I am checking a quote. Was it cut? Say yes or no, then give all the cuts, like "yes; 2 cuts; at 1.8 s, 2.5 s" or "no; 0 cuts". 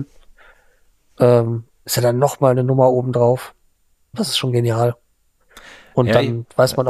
yes; 1 cut; at 4.1 s